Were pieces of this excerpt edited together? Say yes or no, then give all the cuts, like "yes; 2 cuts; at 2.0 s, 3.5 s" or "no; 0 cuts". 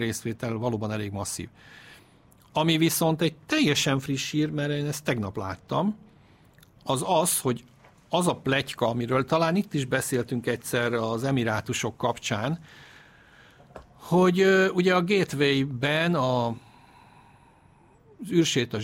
no; 0 cuts